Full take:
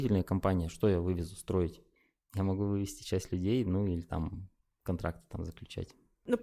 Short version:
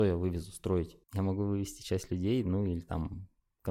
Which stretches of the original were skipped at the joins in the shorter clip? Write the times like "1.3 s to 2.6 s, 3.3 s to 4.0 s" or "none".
1.9 s to 2.2 s